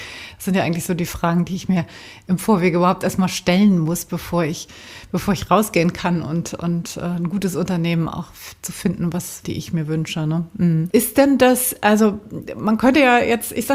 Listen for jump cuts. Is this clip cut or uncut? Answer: cut